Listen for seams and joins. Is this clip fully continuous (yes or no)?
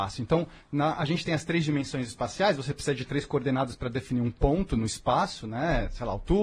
yes